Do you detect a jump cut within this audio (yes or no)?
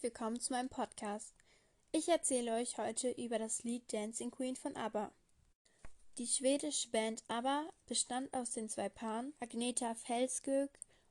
yes